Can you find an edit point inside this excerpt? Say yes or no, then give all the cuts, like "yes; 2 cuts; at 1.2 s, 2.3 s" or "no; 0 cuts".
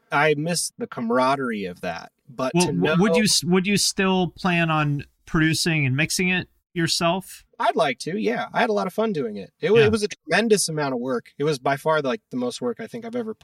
no; 0 cuts